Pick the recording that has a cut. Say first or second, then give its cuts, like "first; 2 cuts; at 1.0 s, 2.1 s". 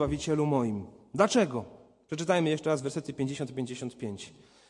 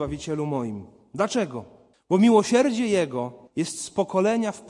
second; 2 cuts; at 1.9 s, 3.5 s